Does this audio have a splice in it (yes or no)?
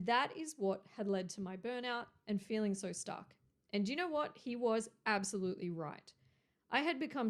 no